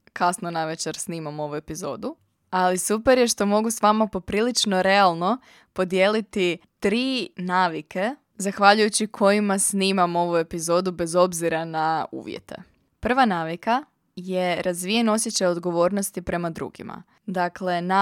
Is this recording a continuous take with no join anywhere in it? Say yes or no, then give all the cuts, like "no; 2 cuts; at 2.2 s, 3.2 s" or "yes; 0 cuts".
yes; 0 cuts